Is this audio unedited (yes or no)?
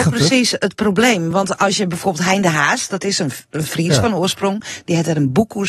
yes